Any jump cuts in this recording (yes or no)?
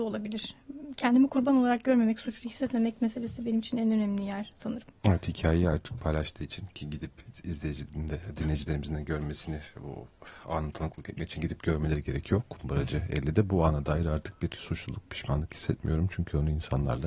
no